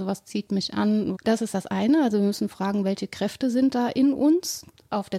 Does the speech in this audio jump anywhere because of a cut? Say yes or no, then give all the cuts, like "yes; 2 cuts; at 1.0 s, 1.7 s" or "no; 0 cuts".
yes; 1 cut; at 1.1 s